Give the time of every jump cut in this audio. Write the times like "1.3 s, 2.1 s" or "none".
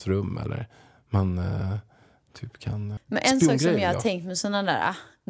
3.0 s